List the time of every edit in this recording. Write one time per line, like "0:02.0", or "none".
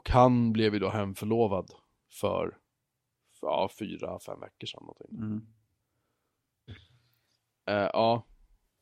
0:06.7

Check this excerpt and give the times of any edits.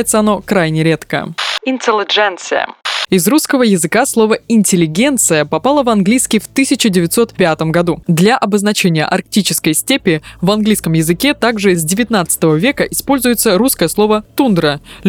0:08.0

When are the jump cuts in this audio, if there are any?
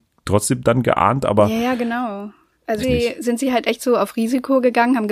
0:02.8

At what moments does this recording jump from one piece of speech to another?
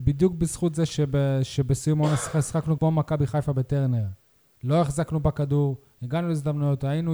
0:02.8
0:04.6

